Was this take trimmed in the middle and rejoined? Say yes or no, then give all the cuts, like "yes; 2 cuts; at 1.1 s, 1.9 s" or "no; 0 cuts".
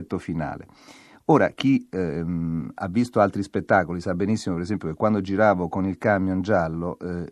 no; 0 cuts